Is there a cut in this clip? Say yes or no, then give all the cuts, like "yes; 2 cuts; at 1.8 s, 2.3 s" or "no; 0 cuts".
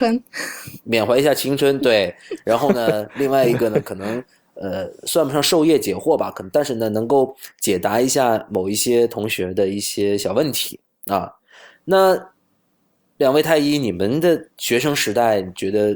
yes; 1 cut; at 14.5 s